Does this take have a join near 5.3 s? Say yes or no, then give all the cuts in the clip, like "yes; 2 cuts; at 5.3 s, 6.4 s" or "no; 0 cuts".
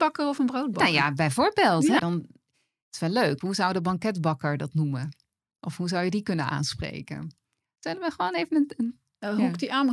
no; 2 cuts; at 2.0 s, 3.4 s